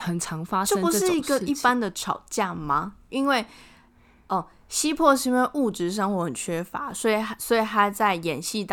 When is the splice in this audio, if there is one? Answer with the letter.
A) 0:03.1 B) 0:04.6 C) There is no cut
A